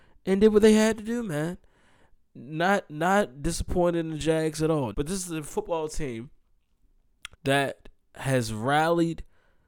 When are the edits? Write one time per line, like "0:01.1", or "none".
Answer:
0:04.9
0:07.3

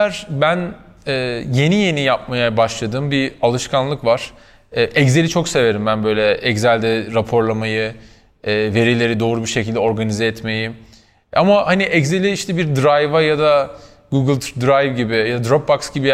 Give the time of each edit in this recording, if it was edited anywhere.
none

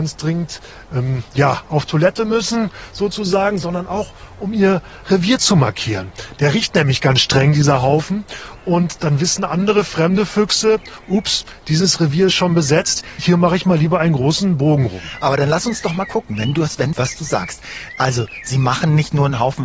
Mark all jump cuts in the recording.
0:13.2
0:16.9

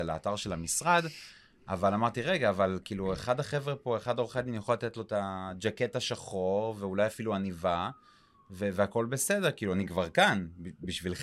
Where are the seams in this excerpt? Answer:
none

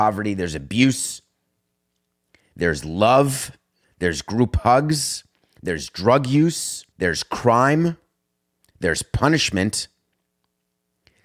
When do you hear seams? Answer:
0:06.9

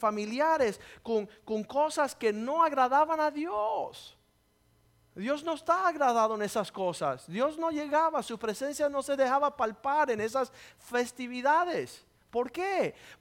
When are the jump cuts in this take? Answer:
none

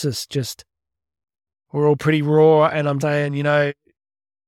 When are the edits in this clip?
0:03.0

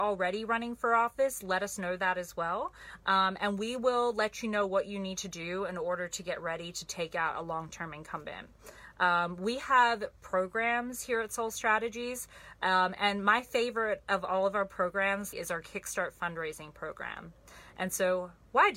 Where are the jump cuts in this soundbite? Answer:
0:15.3

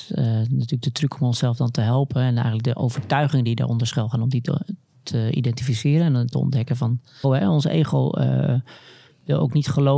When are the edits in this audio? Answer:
0:07.2

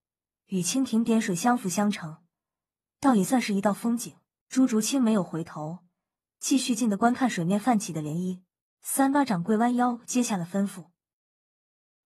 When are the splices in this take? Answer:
0:04.5
0:06.8
0:08.8

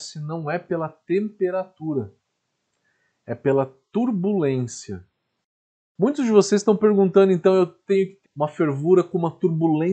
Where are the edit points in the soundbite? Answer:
0:08.2

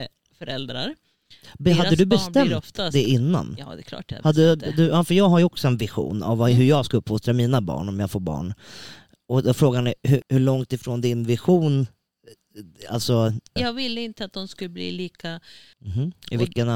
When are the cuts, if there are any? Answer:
0:10.2
0:13.6
0:15.7

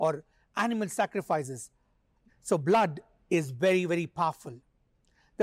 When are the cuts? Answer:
0:02.3

